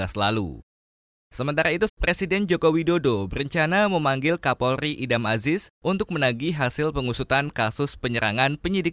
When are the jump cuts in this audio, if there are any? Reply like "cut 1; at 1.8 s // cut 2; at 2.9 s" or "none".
cut 1; at 1.9 s